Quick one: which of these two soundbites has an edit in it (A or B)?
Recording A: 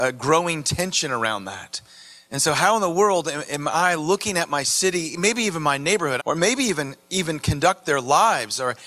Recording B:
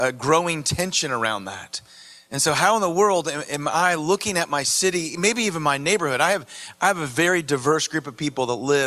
A